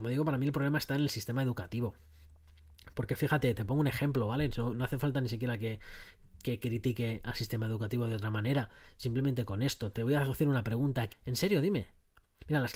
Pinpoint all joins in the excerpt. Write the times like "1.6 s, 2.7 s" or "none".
11.1 s